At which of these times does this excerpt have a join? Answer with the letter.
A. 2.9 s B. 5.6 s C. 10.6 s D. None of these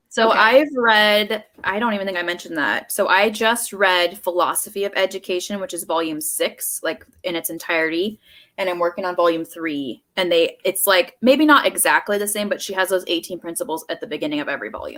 D